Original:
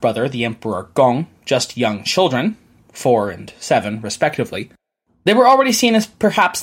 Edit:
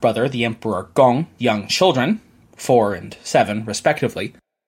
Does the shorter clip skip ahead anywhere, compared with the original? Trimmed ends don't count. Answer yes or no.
yes